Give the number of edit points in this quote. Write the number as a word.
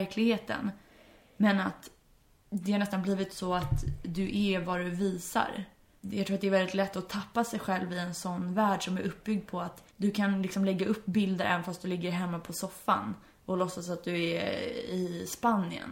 two